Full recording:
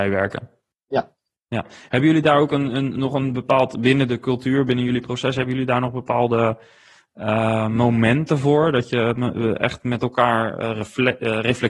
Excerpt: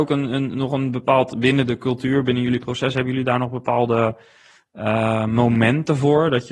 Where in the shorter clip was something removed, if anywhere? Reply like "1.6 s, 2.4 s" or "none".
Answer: none